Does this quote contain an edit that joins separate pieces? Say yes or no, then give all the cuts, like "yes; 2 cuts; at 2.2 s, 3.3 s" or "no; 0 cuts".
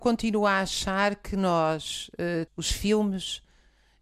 yes; 1 cut; at 2.5 s